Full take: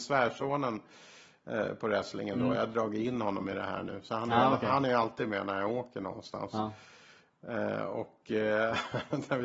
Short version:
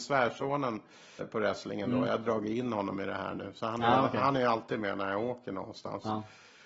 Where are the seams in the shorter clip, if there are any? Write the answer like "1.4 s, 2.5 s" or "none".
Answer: 1.2 s